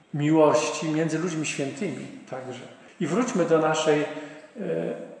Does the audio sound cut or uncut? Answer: cut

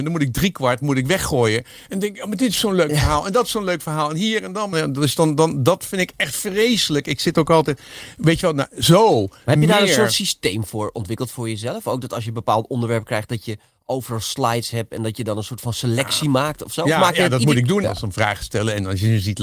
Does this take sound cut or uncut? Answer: cut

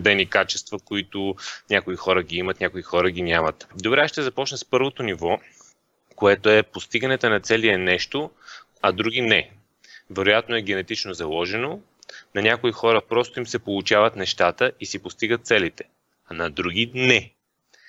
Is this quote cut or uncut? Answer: cut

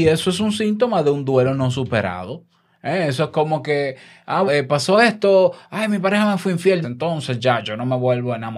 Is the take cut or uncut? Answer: cut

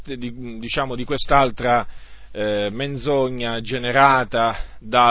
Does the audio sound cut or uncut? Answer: uncut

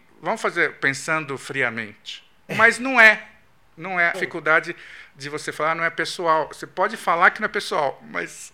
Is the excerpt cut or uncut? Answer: cut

